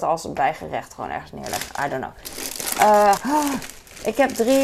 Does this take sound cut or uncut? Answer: cut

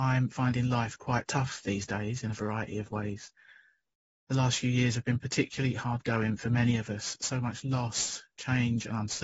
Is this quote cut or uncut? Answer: uncut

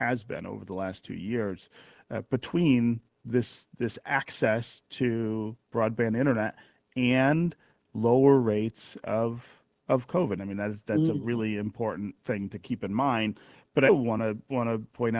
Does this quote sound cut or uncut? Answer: cut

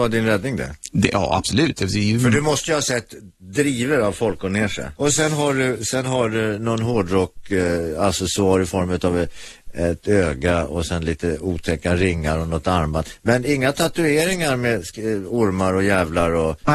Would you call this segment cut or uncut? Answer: cut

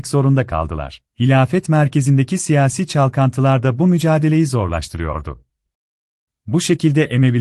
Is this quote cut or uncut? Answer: cut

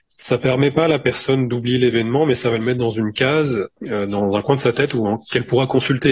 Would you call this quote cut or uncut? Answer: cut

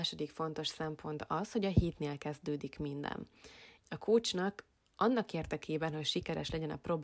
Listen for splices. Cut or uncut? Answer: cut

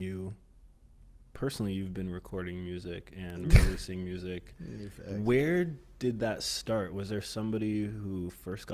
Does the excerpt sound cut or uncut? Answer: uncut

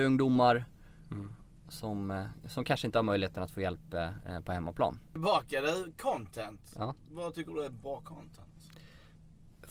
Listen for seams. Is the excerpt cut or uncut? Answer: uncut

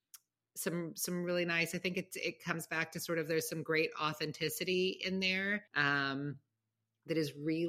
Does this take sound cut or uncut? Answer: cut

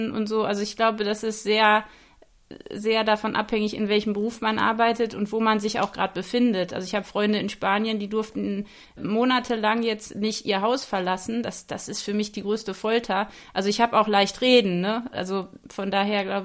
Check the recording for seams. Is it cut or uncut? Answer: uncut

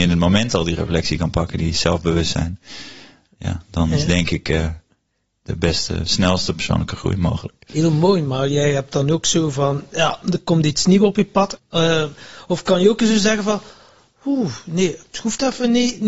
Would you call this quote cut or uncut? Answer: cut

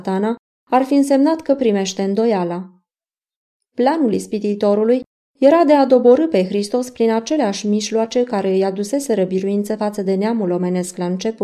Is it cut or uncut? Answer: uncut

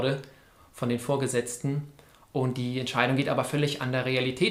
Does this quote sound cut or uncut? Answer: uncut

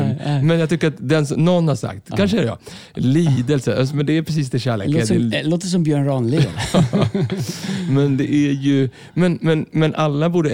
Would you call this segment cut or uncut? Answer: uncut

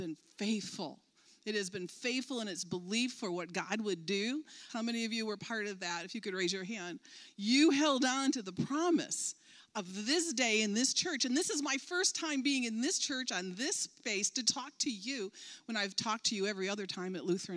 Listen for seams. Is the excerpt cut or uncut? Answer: cut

